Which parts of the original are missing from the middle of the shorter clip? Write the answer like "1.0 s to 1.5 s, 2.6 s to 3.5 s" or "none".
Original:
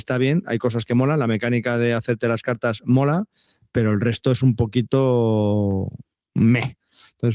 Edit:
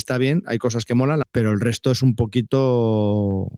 1.2 s to 3.6 s